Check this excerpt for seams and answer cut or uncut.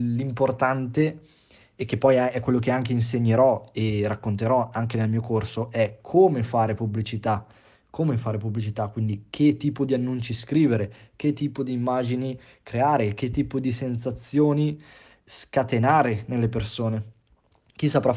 uncut